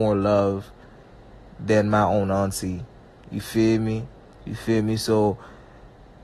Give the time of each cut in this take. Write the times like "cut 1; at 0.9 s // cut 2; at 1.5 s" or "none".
cut 1; at 4.3 s